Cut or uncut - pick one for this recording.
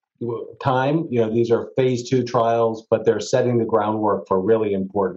uncut